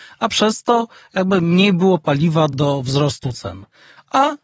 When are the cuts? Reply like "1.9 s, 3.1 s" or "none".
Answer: 2.5 s

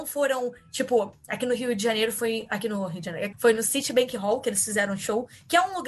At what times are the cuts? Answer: 3.3 s

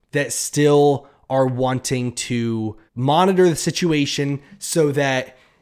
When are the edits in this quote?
2.9 s

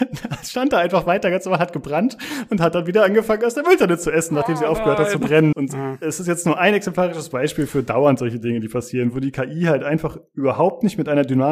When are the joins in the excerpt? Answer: 5.5 s

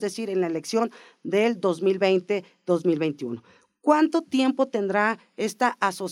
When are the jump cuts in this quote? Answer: none

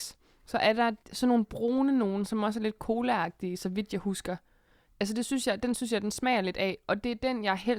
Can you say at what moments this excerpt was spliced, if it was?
1.0 s

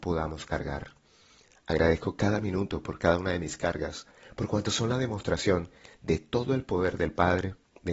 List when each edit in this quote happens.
none

